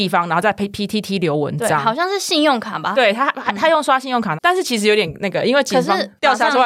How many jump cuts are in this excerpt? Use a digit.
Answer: 2